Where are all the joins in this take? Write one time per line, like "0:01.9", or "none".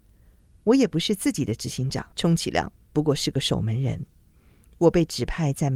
0:02.1